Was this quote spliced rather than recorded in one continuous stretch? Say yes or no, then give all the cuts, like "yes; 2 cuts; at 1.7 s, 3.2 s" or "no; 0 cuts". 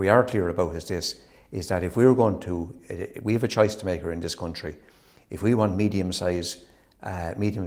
no; 0 cuts